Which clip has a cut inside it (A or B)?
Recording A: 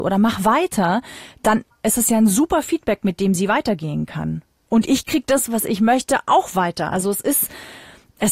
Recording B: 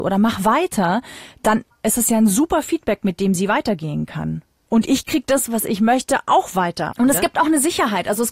B